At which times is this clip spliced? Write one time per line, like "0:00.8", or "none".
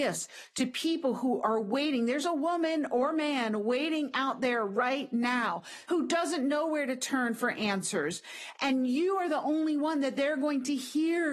0:05.9